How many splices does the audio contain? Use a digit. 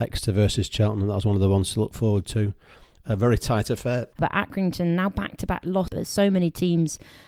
2